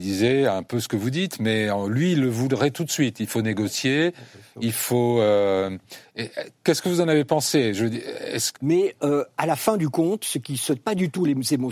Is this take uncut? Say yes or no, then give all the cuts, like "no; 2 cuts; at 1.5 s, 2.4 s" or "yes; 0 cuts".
no; 1 cut; at 8.6 s